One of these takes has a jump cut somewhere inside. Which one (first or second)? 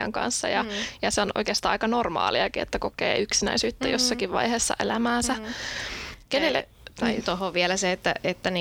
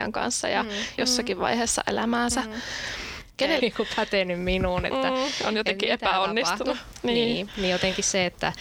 second